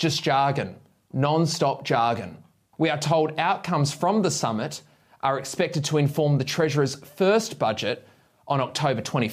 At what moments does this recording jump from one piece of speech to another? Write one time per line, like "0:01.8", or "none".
0:02.7